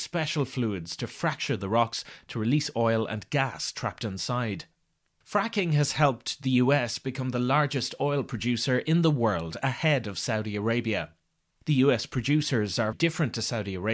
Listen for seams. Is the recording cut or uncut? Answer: cut